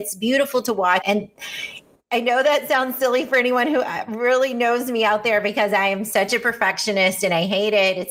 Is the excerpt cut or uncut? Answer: cut